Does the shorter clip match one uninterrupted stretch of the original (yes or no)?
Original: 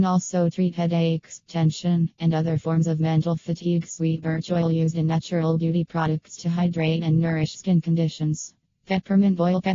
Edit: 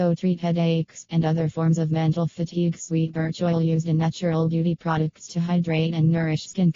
no